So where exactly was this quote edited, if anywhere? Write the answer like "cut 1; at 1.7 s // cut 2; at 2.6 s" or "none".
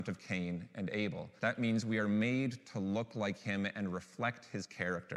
cut 1; at 1.4 s